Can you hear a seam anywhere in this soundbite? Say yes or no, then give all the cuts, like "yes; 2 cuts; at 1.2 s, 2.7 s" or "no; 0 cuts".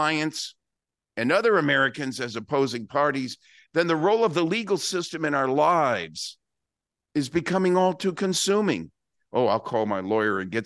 no; 0 cuts